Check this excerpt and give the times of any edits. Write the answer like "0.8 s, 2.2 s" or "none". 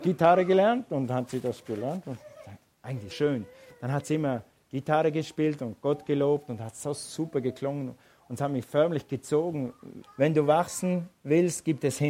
3.1 s, 10.0 s